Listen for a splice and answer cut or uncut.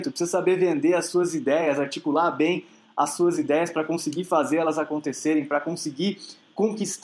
uncut